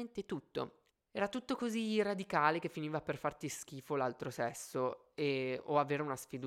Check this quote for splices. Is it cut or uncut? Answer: cut